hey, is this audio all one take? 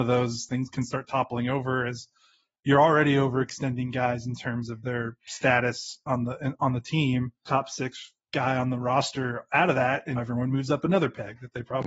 no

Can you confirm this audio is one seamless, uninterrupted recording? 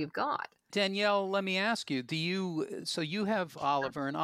yes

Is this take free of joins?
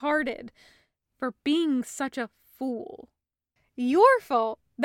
no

